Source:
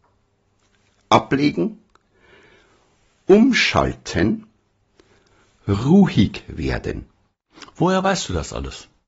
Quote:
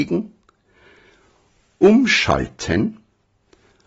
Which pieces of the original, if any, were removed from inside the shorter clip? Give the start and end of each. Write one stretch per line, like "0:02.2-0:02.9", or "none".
none